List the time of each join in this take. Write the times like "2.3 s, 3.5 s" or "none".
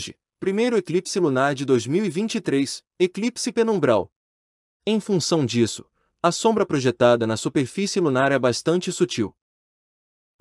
4.7 s